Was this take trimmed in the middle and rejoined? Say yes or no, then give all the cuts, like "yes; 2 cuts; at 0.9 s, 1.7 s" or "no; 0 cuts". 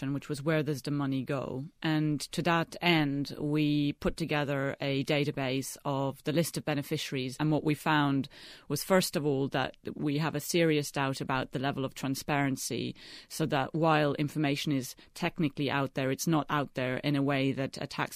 no; 0 cuts